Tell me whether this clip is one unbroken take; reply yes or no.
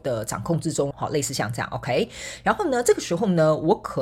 no